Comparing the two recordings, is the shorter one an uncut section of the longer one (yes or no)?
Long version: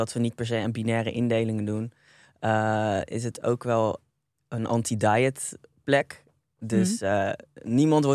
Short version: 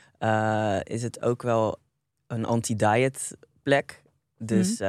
yes